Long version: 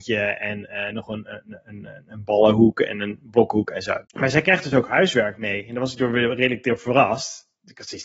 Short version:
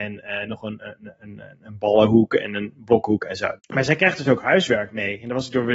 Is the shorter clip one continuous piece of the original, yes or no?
yes